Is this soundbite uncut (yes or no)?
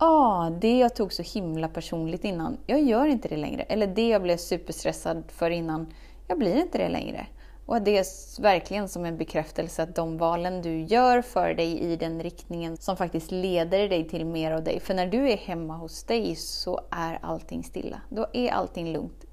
no